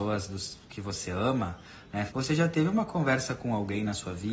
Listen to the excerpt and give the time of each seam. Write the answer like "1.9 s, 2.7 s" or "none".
2.1 s

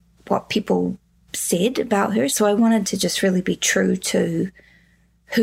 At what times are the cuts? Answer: 2.3 s

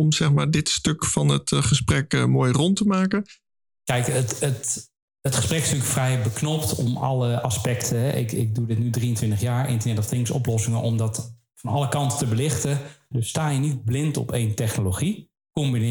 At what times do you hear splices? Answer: 13.1 s

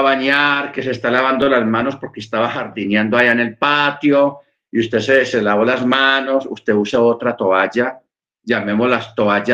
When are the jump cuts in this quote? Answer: none

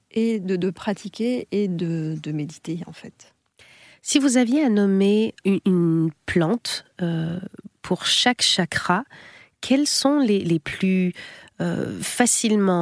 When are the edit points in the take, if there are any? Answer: 5.4 s, 10.4 s

